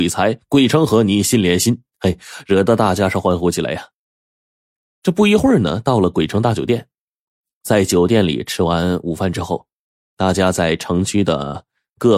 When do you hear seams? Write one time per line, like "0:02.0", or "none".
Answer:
none